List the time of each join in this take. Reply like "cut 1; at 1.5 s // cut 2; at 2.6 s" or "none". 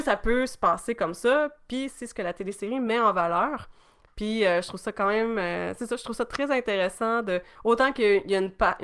none

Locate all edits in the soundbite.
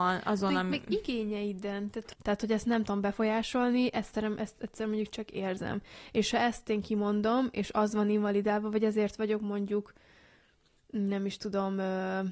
cut 1; at 2.1 s

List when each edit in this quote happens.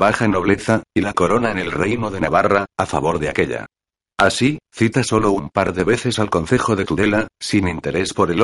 cut 1; at 4.0 s

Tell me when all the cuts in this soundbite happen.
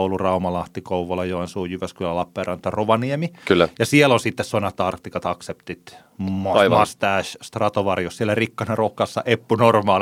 none

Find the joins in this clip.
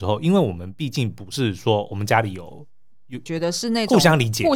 cut 1; at 3.3 s

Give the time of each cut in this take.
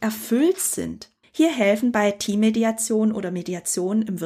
cut 1; at 1.2 s

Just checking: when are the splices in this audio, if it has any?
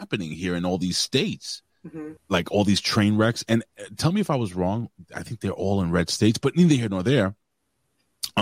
cut 1; at 2.2 s

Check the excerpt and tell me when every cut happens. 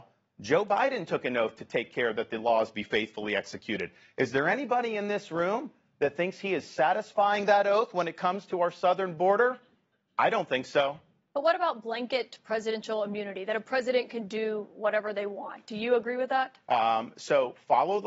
cut 1; at 16.6 s

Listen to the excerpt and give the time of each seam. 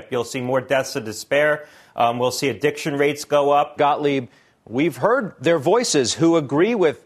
cut 1; at 3.8 s

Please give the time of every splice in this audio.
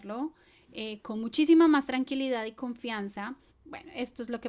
cut 1; at 3.5 s

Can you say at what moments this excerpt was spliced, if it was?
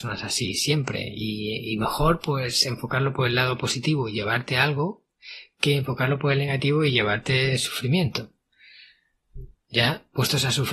none

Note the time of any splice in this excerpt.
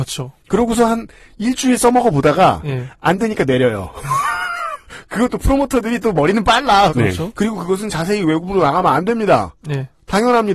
cut 1; at 6.9 s

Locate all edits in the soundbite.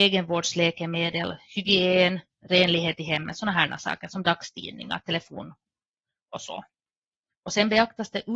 none

